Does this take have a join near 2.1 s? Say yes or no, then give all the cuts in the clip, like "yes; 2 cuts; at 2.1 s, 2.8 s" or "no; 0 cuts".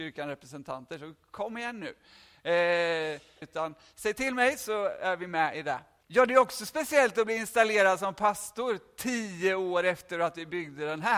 no; 2 cuts; at 3.4 s, 6.0 s